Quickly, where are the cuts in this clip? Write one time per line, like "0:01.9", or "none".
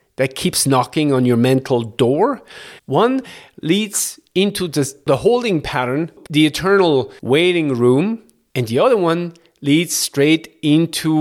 0:02.8